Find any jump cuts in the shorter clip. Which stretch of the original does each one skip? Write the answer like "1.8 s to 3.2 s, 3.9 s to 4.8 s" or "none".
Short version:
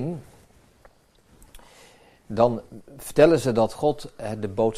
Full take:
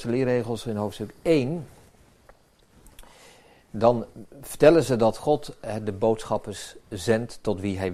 none